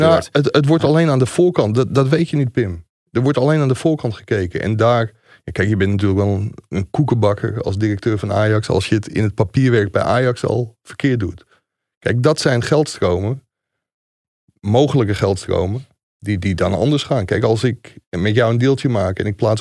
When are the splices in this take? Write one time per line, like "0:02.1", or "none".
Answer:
none